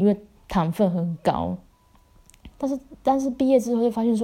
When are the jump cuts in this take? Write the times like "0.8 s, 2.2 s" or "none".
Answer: 2.5 s